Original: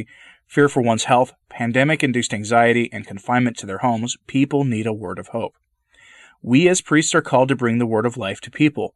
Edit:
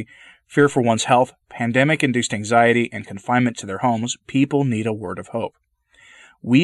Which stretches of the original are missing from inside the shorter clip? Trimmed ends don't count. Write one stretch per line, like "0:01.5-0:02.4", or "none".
none

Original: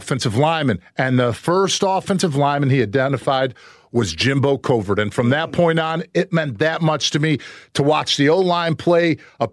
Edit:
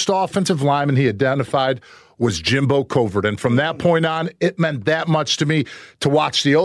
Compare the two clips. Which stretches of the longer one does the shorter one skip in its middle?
none

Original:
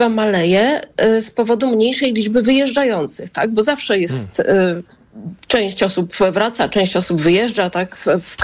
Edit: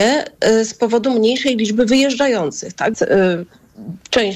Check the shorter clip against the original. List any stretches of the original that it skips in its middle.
0:03.5-0:04.3

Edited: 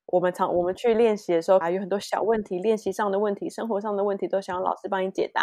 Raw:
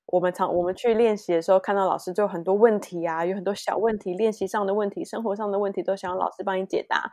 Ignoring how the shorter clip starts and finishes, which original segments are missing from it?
0:01.6-0:03.2

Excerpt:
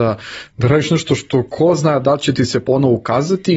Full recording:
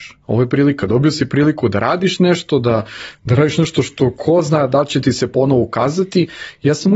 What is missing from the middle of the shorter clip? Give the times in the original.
none

